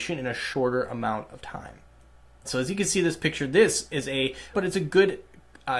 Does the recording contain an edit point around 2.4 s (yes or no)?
yes